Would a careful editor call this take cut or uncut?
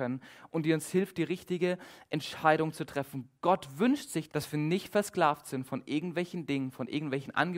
cut